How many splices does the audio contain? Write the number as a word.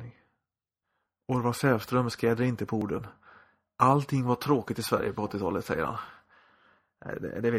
zero